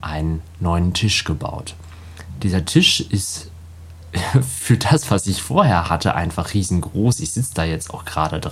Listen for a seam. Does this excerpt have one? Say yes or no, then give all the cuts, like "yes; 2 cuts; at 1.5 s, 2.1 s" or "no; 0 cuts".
no; 0 cuts